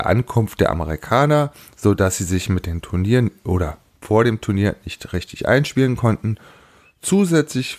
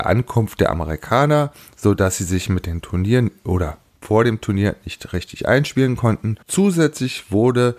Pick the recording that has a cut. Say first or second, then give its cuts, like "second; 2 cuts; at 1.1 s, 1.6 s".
second; 1 cut; at 6.4 s